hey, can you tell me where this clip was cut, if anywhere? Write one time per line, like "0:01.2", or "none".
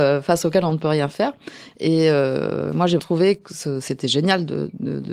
0:01.7
0:03.0